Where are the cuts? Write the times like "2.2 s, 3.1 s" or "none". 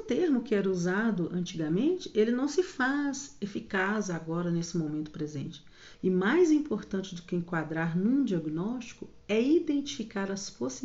5.9 s